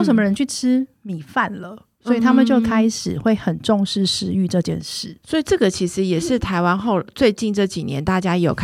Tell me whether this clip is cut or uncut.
uncut